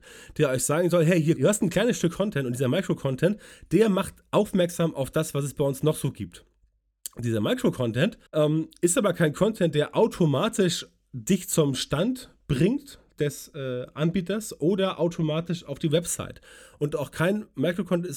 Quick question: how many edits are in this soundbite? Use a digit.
2